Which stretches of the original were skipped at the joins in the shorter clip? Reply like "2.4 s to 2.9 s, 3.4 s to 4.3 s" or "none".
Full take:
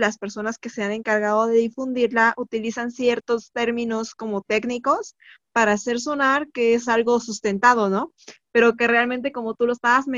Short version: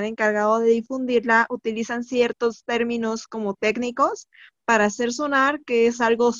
none